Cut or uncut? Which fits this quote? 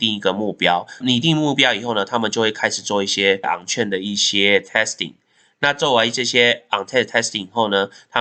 uncut